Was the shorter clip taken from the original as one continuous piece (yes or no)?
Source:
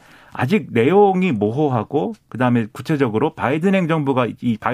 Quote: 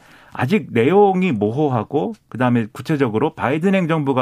yes